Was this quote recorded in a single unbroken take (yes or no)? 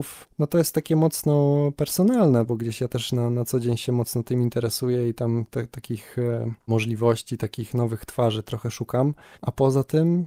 yes